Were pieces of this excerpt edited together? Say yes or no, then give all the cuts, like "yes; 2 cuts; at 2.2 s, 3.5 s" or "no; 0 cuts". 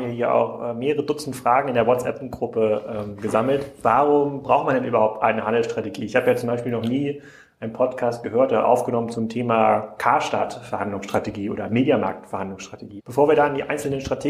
yes; 1 cut; at 13.0 s